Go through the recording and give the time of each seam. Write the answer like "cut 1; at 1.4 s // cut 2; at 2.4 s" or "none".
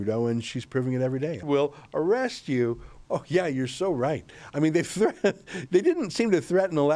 cut 1; at 1.4 s // cut 2; at 3.0 s